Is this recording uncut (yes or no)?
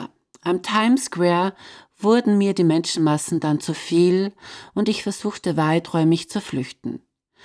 yes